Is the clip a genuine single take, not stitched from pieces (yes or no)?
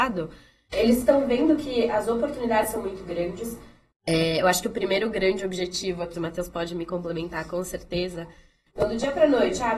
no